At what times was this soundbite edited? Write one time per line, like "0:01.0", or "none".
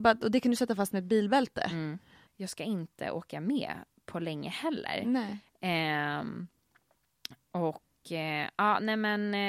0:02.3